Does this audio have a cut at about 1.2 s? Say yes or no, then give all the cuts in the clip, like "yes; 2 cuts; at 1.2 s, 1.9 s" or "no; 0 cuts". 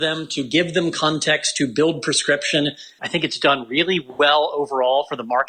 no; 1 cut; at 3.0 s